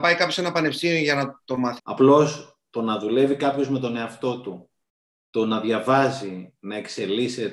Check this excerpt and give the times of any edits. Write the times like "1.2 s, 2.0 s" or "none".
1.8 s